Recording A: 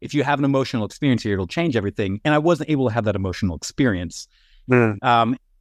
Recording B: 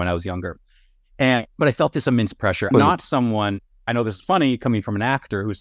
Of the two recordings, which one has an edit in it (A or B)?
B